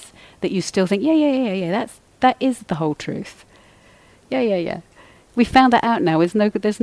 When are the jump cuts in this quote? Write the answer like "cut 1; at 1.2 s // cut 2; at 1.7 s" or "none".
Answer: none